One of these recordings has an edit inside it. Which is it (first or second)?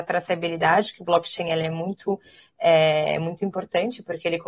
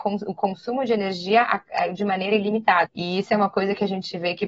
second